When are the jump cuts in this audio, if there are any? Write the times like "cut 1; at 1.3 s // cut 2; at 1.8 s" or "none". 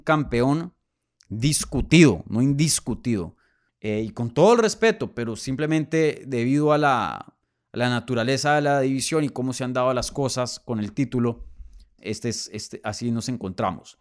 cut 1; at 3.7 s // cut 2; at 12.0 s